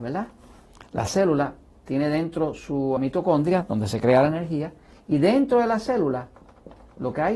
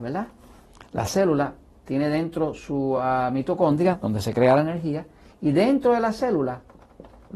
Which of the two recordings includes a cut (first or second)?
first